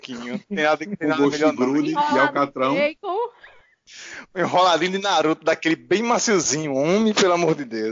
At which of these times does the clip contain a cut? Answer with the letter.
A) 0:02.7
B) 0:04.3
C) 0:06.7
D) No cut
D